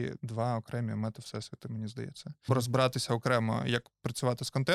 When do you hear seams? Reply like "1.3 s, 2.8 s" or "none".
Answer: 2.5 s